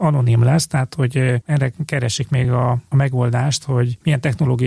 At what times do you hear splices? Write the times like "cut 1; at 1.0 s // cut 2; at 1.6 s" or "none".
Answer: none